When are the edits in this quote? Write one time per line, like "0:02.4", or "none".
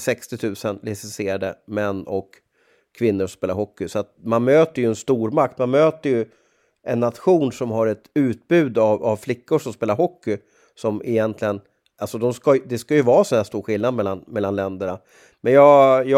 none